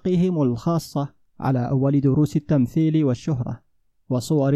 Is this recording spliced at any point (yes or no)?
no